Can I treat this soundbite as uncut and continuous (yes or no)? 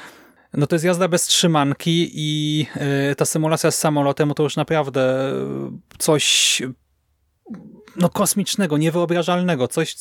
yes